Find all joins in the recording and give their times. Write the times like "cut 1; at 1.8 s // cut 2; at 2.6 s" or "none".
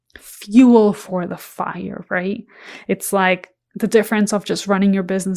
none